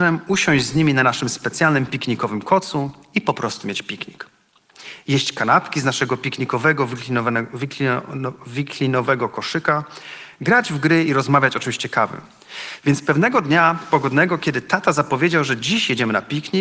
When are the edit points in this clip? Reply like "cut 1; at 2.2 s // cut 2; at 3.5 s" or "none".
none